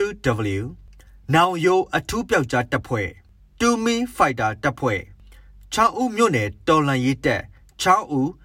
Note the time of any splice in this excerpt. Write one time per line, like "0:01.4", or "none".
none